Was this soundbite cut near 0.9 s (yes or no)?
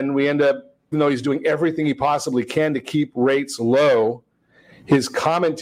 yes